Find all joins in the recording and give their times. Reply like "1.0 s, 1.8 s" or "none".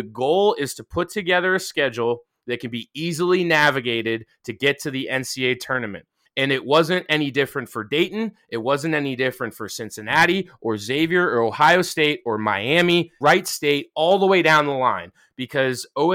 6.2 s, 13.2 s